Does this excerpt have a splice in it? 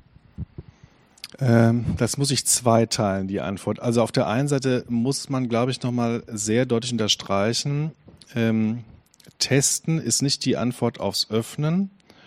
yes; 1 cut; at 1.3 s

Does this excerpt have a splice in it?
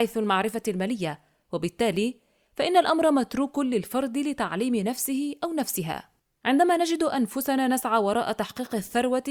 no; 0 cuts

